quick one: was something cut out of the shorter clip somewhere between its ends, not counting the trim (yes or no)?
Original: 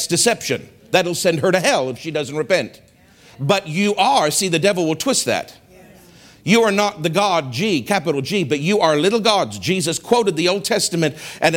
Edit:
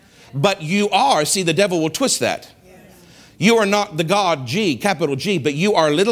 no